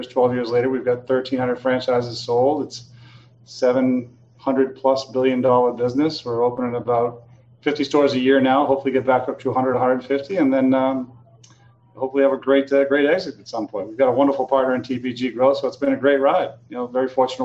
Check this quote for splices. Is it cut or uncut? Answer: uncut